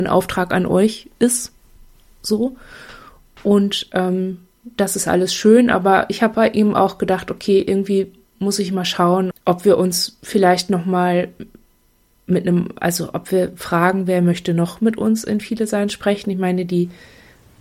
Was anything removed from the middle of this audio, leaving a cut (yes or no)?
yes